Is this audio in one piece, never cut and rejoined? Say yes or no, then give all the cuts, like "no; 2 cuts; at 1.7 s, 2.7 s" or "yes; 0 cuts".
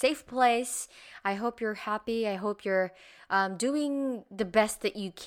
yes; 0 cuts